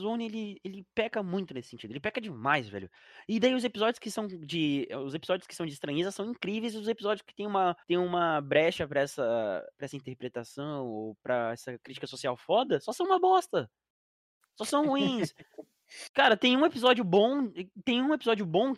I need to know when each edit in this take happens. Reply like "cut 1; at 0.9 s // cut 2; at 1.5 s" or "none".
cut 1; at 7.8 s